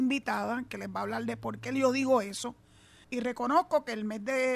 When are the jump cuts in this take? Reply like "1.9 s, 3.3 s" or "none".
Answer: 3.0 s